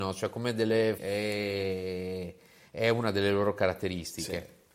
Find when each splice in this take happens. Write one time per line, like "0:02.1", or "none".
0:01.0